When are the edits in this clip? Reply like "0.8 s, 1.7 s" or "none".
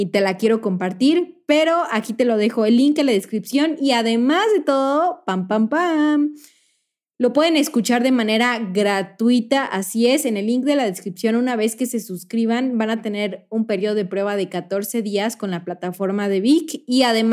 none

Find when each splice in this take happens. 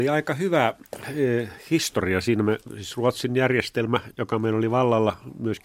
none

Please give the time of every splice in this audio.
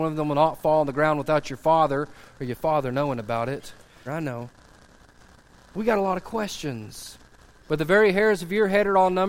4.1 s, 7.6 s

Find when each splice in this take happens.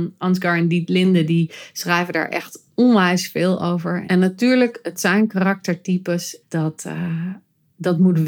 4.0 s, 6.4 s

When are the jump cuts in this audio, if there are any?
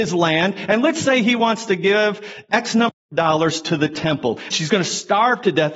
4.5 s

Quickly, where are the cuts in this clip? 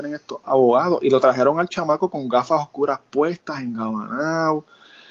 none

